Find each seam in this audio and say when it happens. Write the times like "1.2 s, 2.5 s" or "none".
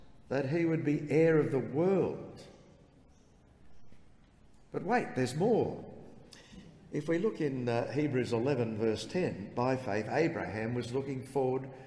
none

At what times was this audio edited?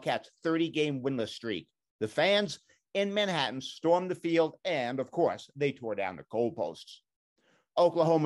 none

